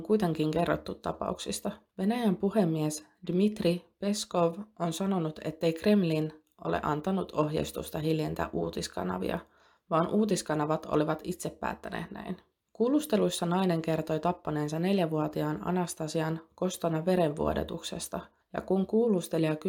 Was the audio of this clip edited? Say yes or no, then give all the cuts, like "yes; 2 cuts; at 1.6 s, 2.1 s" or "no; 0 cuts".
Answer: no; 0 cuts